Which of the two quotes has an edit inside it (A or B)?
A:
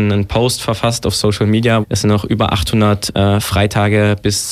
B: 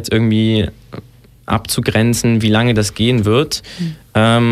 A